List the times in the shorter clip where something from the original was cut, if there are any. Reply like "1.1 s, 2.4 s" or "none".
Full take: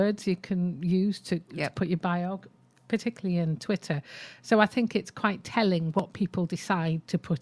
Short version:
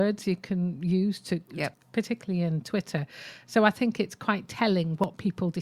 1.7 s